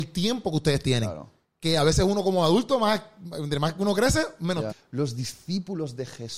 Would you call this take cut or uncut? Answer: cut